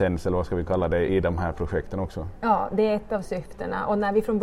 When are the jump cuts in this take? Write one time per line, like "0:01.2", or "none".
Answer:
0:01.1